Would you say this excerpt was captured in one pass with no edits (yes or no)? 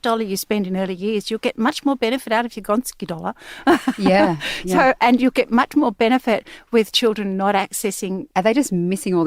no